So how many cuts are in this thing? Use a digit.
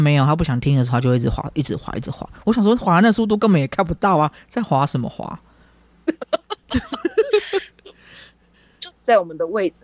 1